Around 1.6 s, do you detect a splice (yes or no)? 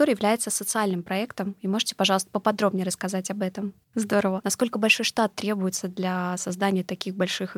no